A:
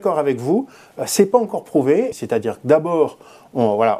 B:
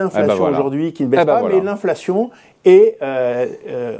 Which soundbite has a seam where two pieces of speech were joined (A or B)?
A